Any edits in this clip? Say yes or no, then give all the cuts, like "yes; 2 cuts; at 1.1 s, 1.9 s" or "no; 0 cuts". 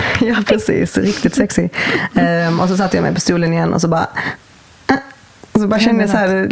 no; 0 cuts